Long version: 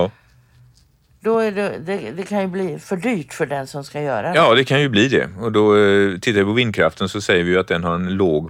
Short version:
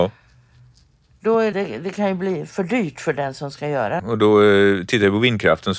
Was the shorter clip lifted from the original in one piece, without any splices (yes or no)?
no